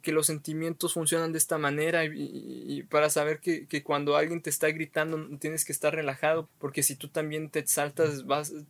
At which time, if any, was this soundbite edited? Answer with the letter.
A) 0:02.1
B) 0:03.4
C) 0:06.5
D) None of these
C